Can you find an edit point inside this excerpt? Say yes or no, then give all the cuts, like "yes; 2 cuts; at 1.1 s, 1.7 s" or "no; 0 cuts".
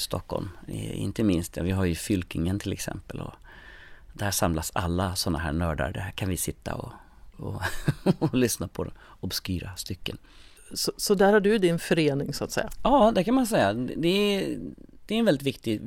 yes; 1 cut; at 7.3 s